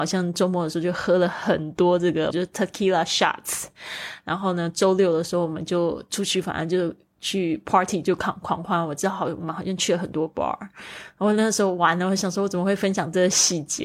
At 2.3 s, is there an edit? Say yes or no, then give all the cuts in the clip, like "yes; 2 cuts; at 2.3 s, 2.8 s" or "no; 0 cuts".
yes; 1 cut; at 2.3 s